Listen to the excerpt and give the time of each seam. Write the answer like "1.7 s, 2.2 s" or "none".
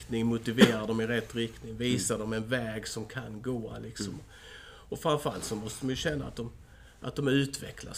none